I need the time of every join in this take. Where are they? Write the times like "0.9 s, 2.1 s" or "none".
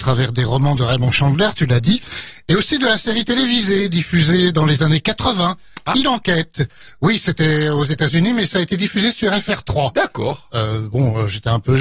none